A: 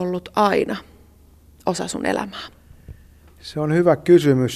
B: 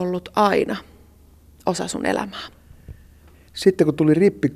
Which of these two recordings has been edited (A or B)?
B